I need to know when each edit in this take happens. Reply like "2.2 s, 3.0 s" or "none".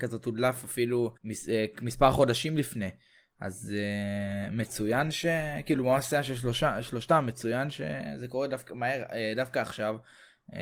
1.2 s